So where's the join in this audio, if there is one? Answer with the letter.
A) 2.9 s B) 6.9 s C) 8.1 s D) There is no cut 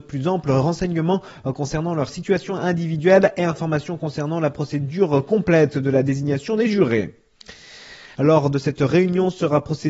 C